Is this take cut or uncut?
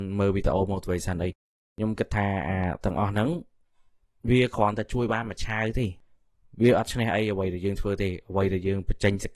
uncut